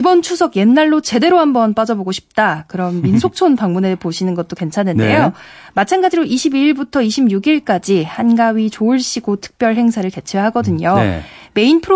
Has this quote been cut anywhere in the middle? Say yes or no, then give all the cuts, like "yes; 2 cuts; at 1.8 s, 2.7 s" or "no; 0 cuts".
no; 0 cuts